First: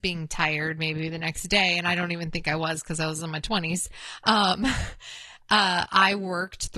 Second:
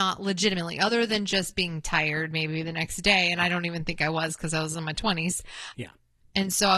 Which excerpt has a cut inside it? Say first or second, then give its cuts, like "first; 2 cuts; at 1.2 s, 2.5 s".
second; 1 cut; at 5.7 s